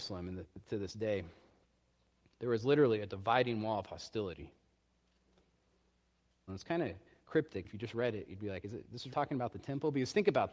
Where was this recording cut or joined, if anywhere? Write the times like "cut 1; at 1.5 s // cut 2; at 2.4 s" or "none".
cut 1; at 6.5 s // cut 2; at 7.6 s // cut 3; at 9.1 s